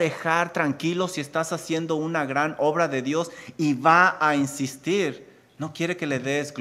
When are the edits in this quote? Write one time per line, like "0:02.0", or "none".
none